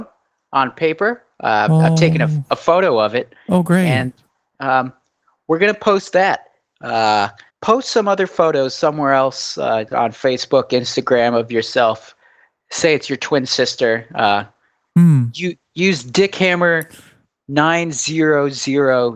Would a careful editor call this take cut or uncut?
cut